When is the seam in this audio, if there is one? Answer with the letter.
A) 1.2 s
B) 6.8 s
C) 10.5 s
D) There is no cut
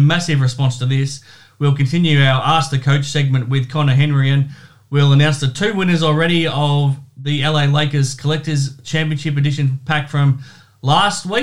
D